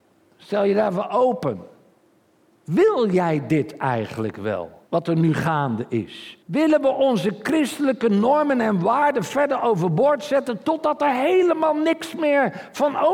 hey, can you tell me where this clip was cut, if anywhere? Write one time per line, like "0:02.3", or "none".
0:04.9
0:06.4